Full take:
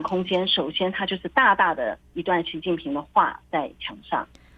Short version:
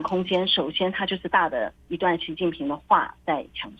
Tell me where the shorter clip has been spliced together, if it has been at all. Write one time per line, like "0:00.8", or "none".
0:01.3